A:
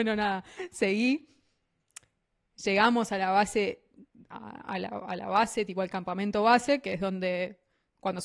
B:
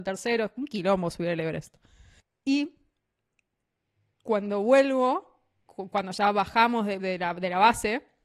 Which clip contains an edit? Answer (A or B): B